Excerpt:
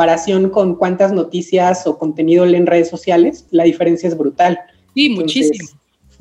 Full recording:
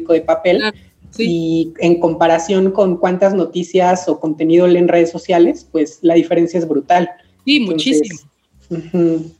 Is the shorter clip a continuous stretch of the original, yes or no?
no